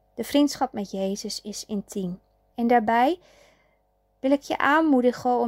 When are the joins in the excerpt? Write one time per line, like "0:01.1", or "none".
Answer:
0:02.5